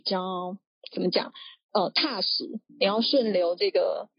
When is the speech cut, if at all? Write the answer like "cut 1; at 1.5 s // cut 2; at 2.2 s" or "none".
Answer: cut 1; at 2.7 s